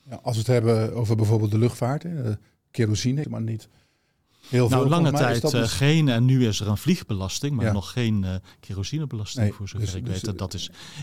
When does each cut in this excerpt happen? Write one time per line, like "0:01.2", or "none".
0:03.2